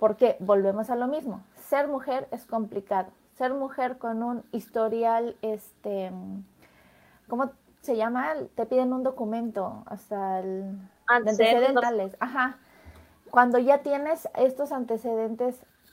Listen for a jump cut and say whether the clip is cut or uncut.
cut